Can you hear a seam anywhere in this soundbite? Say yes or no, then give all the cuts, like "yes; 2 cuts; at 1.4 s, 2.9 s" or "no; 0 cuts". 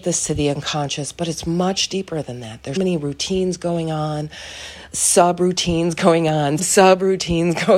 yes; 2 cuts; at 2.8 s, 6.6 s